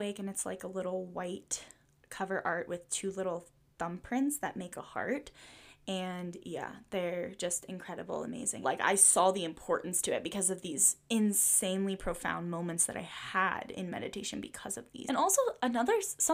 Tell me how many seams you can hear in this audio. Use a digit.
2